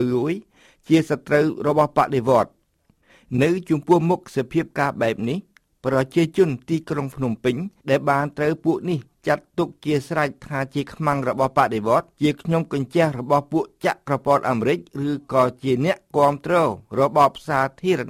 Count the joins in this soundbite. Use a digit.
2